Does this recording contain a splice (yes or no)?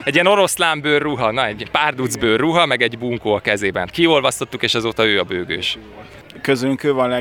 no